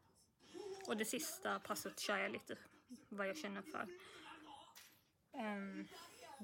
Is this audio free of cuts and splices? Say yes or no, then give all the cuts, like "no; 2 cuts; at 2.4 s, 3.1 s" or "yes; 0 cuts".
no; 1 cut; at 5.3 s